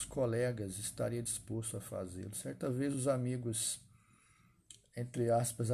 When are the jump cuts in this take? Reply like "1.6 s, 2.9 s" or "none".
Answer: none